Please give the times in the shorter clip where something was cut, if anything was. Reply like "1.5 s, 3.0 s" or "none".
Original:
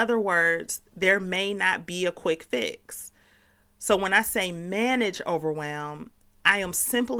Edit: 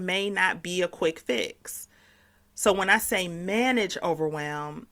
none

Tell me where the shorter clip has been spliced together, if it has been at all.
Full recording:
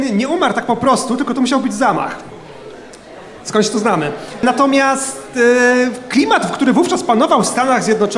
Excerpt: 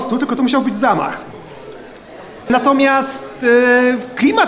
2.5 s

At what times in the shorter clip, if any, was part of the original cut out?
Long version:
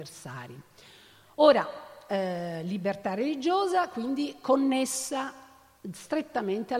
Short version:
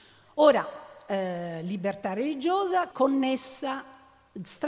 2.9 s

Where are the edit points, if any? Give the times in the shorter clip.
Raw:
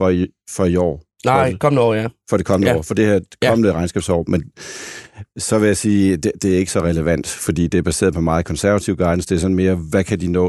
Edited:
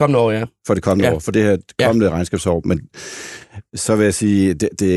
none

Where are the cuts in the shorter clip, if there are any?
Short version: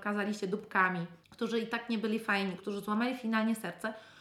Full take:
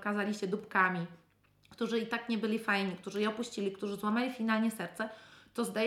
1.2 s, 2.6 s

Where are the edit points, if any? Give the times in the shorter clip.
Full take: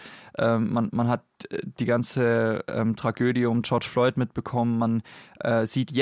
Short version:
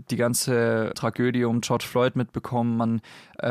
0.9 s

